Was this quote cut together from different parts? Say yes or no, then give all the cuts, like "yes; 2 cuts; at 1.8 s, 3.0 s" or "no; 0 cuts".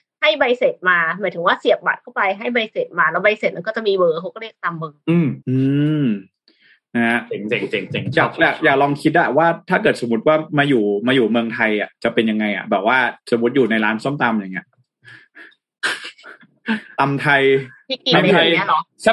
yes; 1 cut; at 5.4 s